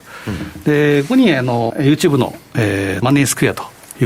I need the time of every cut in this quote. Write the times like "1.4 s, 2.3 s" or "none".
1.7 s, 3.0 s